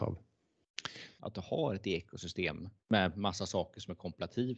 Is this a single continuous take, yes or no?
no